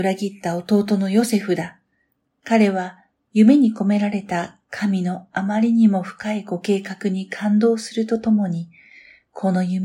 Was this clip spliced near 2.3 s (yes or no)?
yes